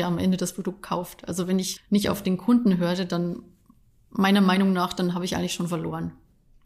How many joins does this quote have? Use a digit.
1